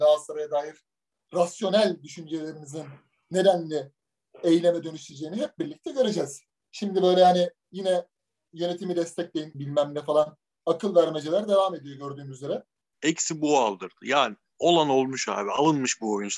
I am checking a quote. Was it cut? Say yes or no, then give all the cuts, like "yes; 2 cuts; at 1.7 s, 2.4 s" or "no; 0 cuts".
yes; 2 cuts; at 9.5 s, 12.9 s